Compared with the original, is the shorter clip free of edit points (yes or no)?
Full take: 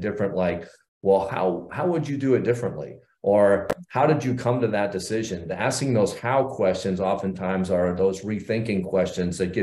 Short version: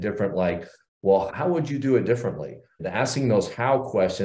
no